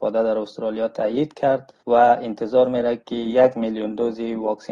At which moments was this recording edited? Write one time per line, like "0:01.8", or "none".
0:01.8